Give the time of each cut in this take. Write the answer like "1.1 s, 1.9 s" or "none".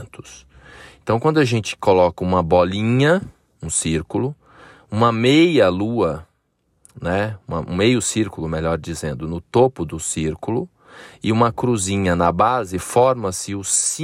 none